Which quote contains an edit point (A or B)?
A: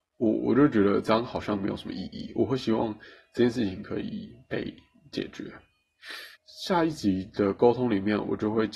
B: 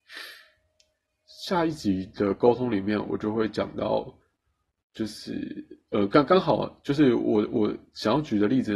A